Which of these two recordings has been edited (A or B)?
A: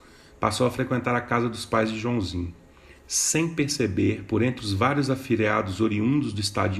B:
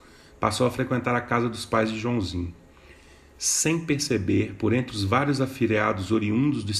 A